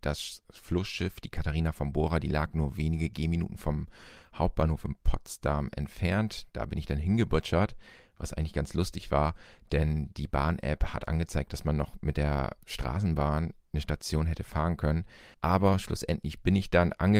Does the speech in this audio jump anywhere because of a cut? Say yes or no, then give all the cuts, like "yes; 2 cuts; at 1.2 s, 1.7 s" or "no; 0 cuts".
yes; 1 cut; at 15.3 s